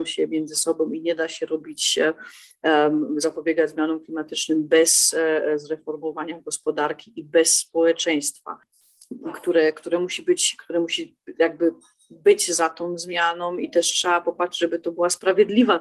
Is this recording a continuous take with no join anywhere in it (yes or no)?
yes